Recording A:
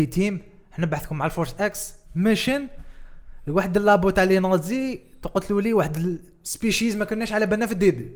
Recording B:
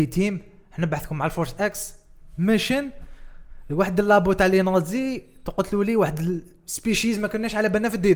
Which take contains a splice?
A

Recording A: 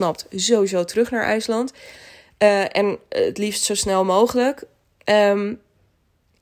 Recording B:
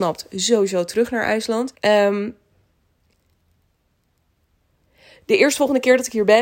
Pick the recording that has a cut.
B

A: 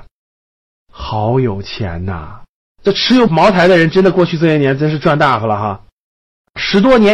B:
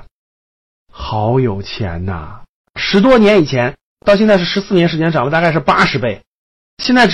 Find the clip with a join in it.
B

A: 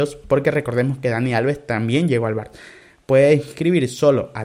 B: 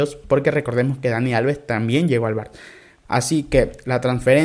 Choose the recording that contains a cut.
B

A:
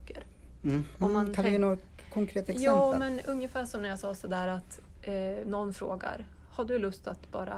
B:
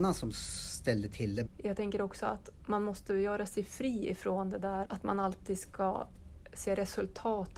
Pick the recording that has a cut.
B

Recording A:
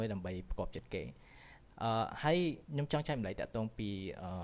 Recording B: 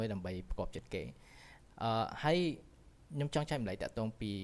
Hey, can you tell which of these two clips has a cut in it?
A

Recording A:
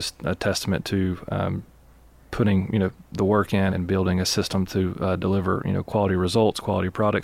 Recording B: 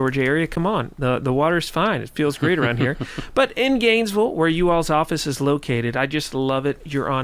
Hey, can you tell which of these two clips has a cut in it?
A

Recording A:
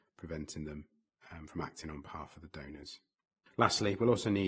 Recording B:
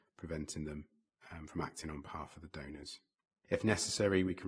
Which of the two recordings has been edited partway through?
B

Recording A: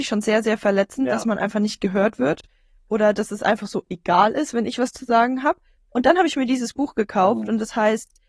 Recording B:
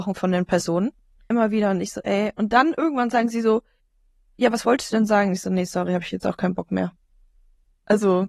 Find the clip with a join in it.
B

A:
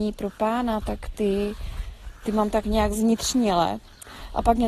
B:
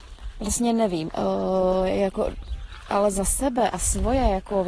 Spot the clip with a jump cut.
B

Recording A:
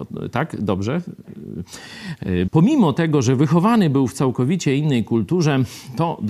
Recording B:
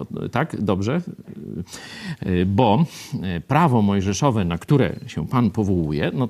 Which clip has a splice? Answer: A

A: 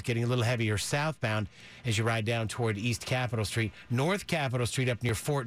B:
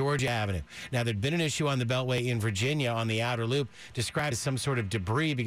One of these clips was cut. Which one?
B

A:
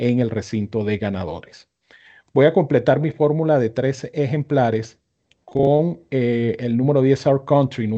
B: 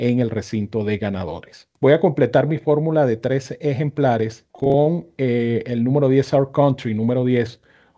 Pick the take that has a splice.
B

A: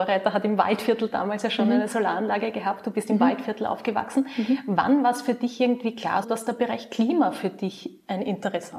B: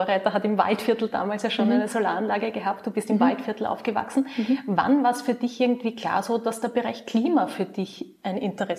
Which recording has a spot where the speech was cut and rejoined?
A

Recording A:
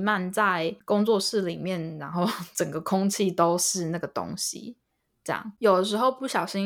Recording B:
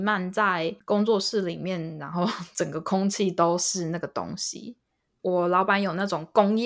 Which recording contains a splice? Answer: B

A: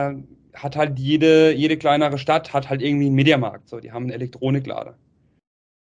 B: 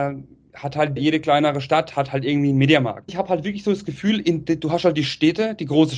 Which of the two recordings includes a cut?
B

